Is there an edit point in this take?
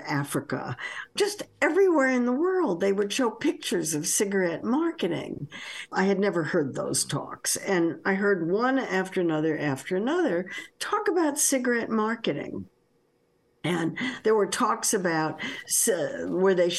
yes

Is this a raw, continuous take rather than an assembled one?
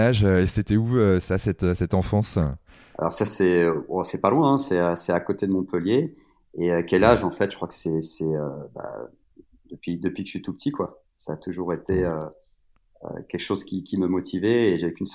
yes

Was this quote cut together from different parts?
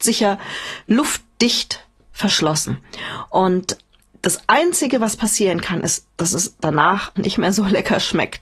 yes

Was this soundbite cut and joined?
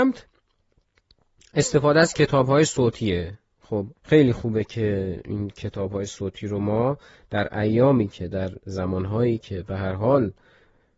yes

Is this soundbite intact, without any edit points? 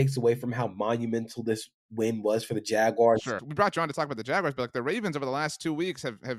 no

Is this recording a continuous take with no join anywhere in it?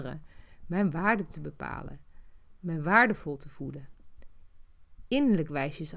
yes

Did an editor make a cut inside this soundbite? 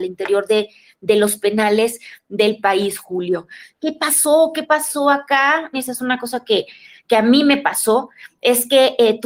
yes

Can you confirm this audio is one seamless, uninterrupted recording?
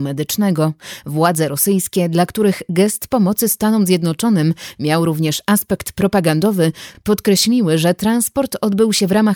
yes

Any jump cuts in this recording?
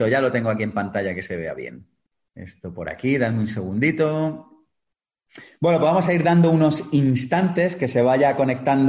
no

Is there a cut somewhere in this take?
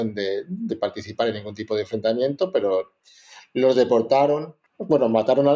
yes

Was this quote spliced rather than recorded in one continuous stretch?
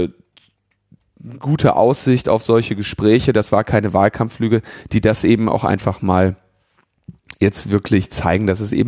no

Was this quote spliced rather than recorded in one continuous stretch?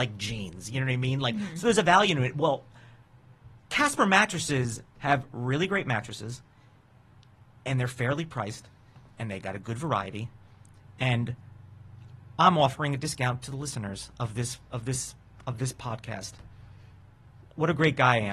no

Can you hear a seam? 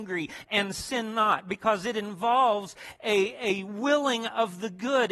no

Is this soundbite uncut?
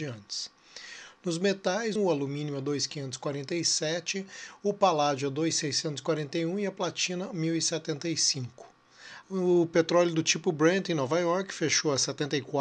no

